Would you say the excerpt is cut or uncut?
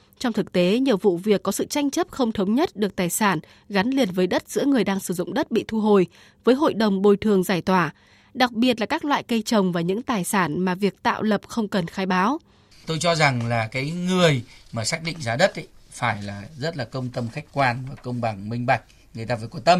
cut